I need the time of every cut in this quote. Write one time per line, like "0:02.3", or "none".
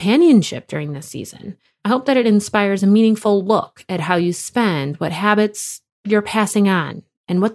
0:01.8